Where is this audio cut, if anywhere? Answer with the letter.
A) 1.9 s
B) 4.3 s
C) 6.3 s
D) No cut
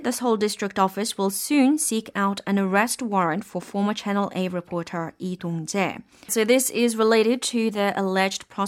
C